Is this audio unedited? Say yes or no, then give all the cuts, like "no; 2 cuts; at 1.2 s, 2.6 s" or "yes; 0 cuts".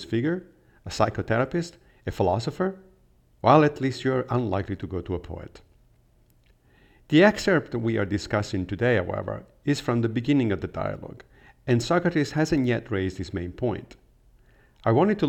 yes; 0 cuts